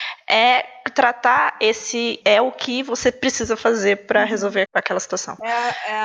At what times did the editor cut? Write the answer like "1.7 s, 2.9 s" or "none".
2.2 s, 4.6 s